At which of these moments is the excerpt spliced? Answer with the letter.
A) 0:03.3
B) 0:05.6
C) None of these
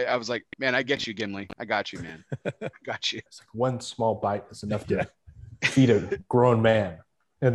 A